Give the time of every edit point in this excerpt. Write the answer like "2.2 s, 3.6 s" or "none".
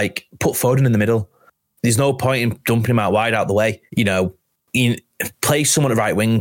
3.9 s